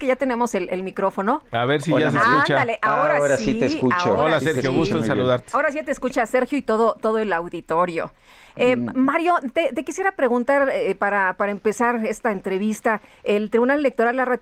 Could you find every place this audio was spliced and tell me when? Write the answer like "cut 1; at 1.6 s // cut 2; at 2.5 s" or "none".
none